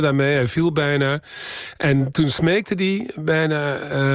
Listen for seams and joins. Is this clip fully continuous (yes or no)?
yes